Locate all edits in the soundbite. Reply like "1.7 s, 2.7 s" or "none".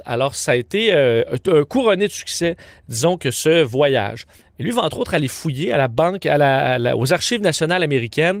4.4 s